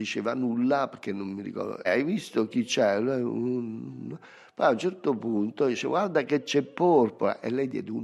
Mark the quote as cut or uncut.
cut